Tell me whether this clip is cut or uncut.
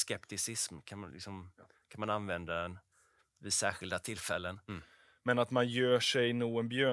cut